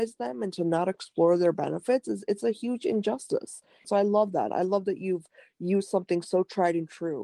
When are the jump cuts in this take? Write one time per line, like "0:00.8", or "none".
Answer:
0:03.8